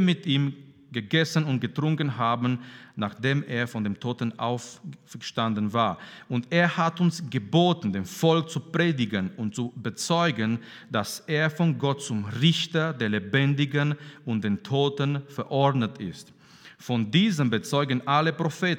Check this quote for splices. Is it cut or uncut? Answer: uncut